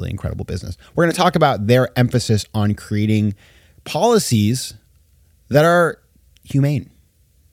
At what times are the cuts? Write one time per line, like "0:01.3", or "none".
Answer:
none